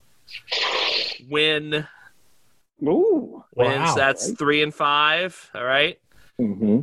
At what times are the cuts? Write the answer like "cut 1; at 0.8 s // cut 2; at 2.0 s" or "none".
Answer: none